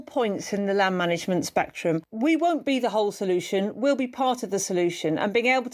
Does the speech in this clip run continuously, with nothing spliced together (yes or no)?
yes